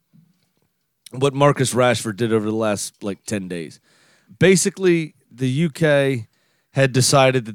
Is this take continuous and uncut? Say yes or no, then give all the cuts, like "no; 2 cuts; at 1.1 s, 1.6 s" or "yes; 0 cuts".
yes; 0 cuts